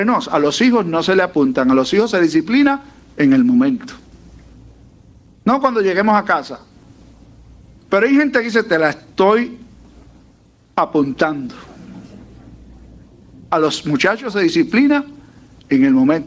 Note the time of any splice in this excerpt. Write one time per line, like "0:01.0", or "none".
0:07.8
0:13.5